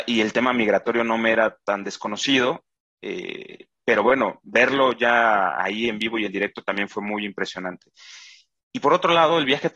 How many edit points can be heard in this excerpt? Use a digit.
0